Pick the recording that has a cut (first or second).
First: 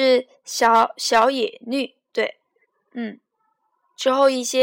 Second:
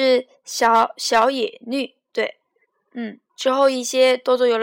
second